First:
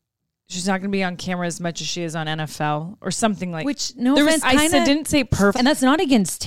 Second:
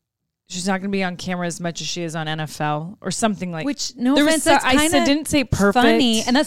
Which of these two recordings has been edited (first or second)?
first